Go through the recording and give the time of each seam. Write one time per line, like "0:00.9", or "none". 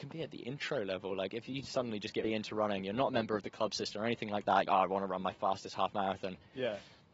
0:02.2
0:04.7